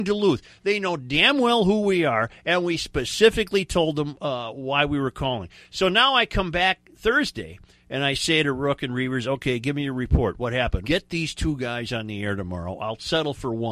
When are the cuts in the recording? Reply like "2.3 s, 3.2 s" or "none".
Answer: 10.8 s